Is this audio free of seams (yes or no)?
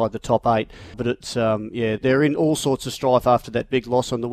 no